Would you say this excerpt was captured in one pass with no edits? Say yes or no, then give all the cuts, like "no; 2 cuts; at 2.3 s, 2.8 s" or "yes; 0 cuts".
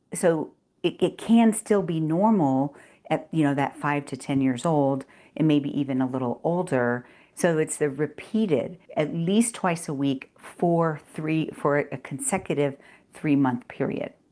no; 2 cuts; at 7.3 s, 8.9 s